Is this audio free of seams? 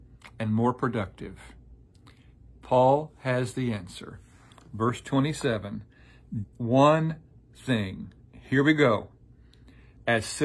no; 1 cut; at 6.4 s

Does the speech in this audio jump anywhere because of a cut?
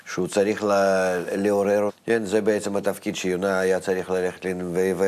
yes; 1 cut; at 1.9 s

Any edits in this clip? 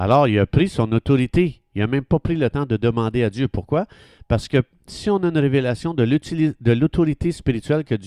no; 0 cuts

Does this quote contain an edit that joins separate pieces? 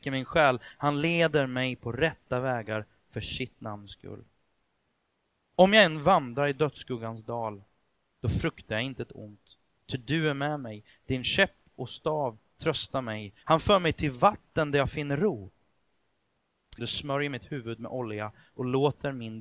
yes; 2 cuts; at 13.4 s, 16.8 s

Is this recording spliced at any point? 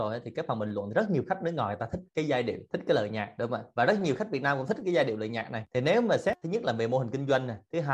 no; 0 cuts

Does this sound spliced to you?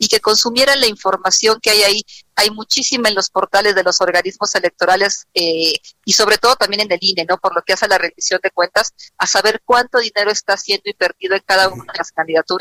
yes; 1 cut; at 9.1 s

